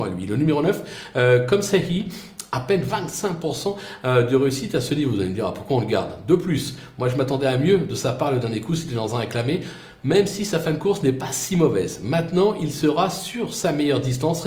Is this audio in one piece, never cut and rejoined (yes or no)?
yes